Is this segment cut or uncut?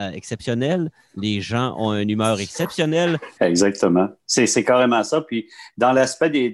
cut